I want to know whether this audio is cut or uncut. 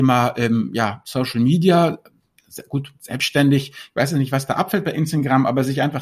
uncut